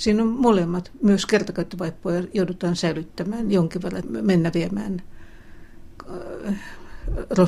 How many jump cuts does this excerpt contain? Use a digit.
1